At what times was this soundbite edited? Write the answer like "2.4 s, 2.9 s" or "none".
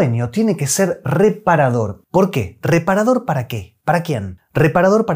none